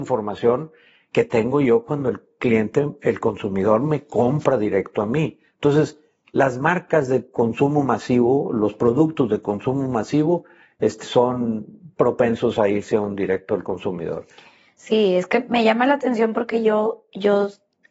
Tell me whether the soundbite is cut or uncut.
cut